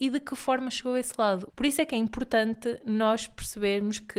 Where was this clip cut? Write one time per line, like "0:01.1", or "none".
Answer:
0:01.5